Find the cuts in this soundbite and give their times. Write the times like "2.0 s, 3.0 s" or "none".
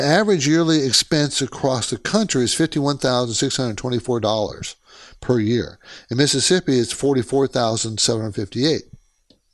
none